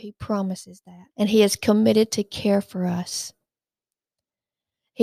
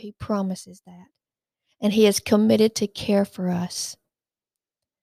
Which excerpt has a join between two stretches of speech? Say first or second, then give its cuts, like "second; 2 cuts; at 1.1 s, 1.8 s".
first; 1 cut; at 1.1 s